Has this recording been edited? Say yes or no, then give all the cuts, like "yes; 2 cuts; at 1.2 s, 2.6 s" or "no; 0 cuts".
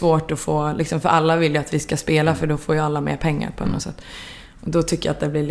no; 0 cuts